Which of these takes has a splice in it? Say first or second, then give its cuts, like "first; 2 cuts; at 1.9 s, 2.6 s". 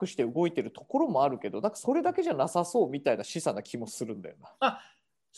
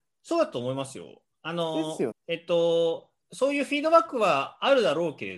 second; 1 cut; at 2.1 s